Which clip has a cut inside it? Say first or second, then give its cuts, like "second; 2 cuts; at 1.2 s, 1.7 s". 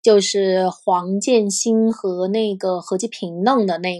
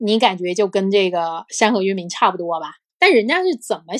second; 1 cut; at 2.9 s